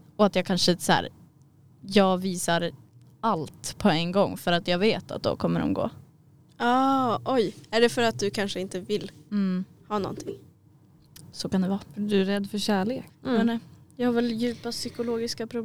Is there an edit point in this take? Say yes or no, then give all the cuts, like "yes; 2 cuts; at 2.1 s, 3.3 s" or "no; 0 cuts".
yes; 1 cut; at 13.1 s